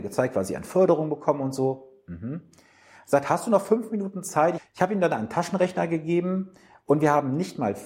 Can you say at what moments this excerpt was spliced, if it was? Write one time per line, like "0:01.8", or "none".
0:04.6